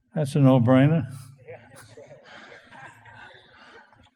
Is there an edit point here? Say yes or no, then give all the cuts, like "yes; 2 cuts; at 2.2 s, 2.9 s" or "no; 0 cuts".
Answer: yes; 1 cut; at 2.7 s